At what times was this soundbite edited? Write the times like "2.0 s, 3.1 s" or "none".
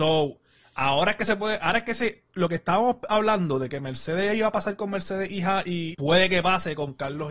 5.9 s